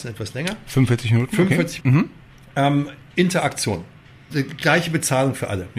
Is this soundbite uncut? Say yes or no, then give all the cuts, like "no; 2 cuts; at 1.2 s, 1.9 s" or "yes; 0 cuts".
no; 2 cuts; at 1.8 s, 4.3 s